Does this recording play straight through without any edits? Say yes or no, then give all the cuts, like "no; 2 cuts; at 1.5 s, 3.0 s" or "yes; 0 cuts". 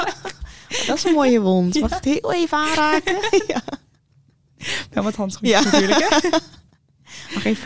yes; 0 cuts